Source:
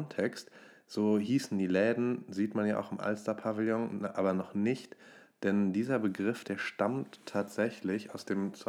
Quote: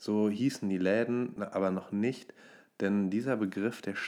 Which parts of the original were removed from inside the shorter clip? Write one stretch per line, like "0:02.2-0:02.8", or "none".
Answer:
0:02.3-0:04.0